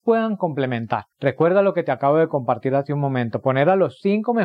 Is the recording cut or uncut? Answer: cut